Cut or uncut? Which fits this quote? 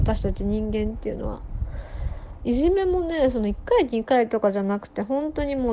cut